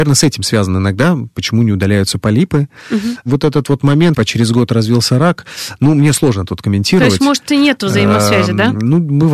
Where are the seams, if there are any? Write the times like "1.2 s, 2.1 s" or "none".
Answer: 4.1 s